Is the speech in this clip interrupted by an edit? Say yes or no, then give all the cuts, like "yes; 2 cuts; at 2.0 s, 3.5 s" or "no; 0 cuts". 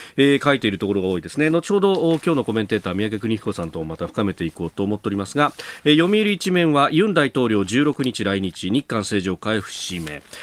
no; 0 cuts